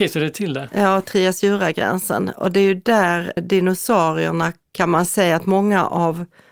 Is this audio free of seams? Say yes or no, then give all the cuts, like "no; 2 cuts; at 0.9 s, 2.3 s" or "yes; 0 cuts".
no; 1 cut; at 3.4 s